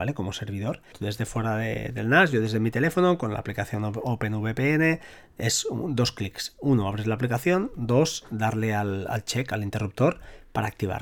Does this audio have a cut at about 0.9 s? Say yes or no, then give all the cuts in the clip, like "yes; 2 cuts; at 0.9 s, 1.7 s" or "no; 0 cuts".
yes; 1 cut; at 0.9 s